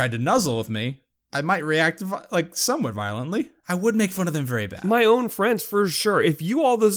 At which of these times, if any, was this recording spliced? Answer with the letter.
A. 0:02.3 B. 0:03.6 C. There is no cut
B